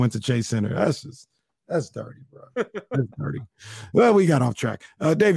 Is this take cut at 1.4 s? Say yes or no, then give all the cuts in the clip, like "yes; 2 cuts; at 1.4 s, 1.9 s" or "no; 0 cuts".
no; 0 cuts